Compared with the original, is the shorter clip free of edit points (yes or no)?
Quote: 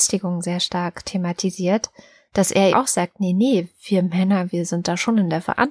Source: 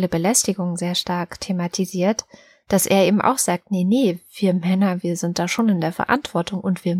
no